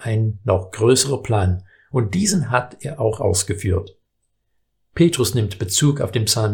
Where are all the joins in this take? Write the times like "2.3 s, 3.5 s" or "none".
none